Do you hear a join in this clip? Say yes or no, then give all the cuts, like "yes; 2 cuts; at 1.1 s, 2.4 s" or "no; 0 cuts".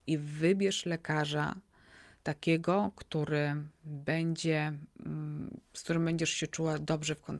no; 0 cuts